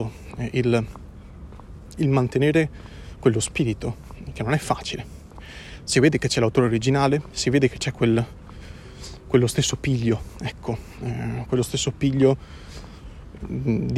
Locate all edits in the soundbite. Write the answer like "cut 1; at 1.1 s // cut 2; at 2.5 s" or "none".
none